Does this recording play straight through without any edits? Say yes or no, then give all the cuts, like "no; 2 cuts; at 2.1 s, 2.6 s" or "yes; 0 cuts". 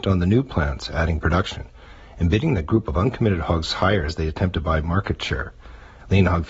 yes; 0 cuts